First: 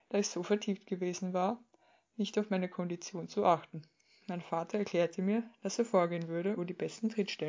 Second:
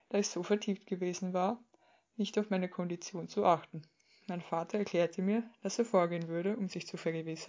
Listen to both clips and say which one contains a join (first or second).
first